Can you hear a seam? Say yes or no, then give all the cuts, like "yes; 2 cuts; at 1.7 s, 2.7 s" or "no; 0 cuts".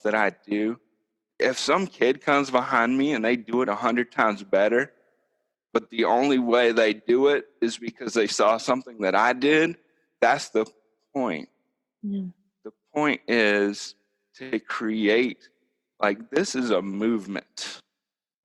no; 0 cuts